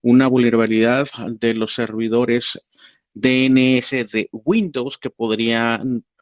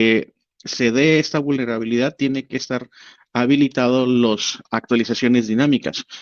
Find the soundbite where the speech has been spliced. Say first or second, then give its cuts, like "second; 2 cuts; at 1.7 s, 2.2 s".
second; 1 cut; at 4.6 s